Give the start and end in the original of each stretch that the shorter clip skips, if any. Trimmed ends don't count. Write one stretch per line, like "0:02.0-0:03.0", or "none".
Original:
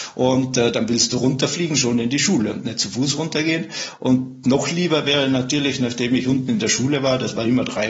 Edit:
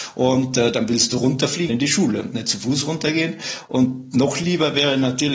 0:01.7-0:02.0